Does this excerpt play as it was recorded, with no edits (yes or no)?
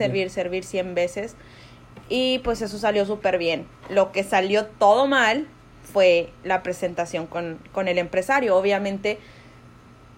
yes